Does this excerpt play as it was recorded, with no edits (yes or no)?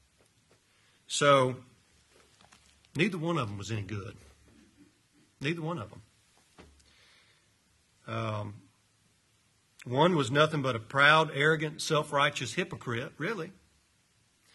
yes